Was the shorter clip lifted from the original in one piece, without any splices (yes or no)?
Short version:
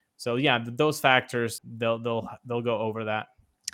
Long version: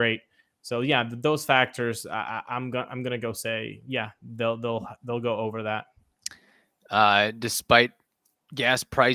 no